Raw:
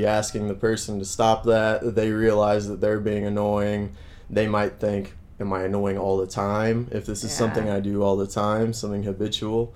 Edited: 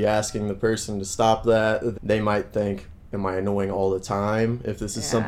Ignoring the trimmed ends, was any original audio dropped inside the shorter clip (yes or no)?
yes